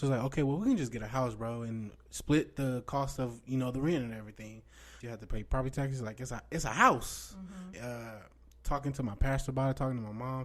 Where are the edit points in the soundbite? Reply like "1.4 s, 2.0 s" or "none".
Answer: 5.0 s, 7.7 s